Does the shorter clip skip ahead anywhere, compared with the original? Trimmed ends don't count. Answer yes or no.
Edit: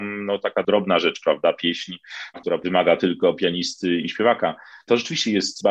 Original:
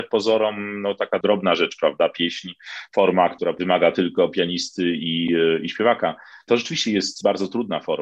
yes